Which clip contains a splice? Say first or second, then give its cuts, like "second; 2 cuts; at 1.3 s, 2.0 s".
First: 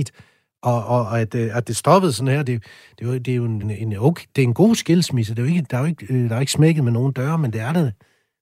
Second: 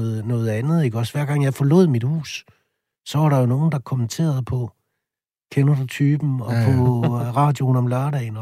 first; 1 cut; at 3.6 s